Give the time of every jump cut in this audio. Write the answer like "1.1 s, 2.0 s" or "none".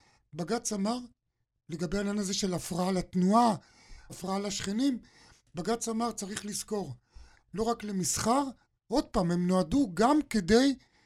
4.1 s, 7.3 s